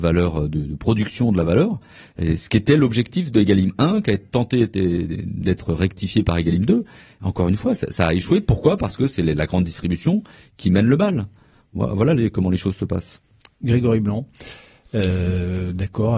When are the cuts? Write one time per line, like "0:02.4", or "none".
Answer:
none